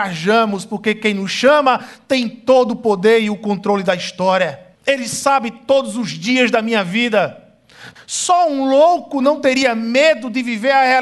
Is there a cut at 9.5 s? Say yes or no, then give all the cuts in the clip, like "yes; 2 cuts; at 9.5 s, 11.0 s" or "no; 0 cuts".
no; 2 cuts; at 4.7 s, 8.0 s